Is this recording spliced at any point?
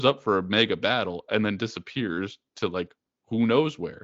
no; 0 cuts

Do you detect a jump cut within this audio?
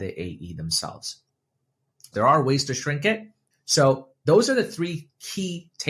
yes; 2 cuts; at 2.1 s, 3.5 s

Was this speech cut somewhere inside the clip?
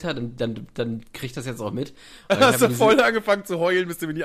no; 0 cuts

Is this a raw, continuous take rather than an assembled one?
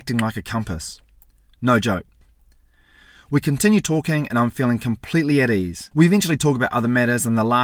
no; 1 cut; at 5.9 s

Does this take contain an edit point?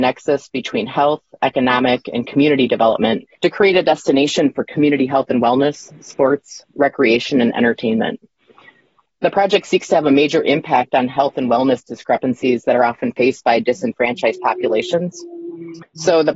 yes; 1 cut; at 3.3 s

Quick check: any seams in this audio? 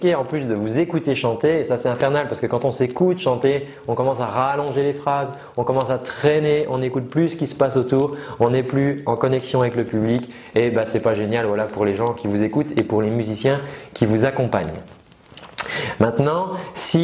no; 0 cuts

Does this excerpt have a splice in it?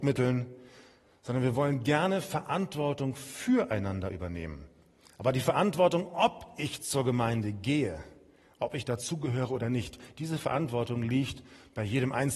no; 0 cuts

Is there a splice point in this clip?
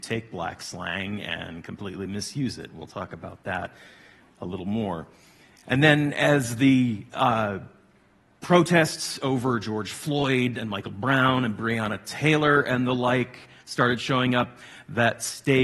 no; 0 cuts

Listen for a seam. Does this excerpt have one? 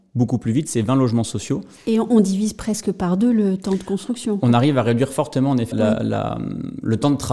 yes; 1 cut; at 5.7 s

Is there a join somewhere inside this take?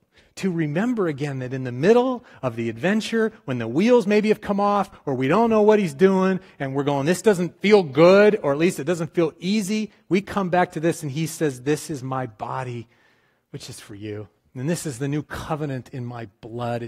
no; 0 cuts

